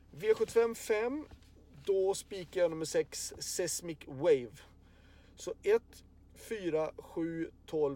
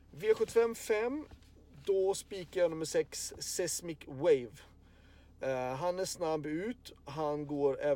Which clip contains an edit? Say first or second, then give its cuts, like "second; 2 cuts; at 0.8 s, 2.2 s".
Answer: first; 1 cut; at 5.2 s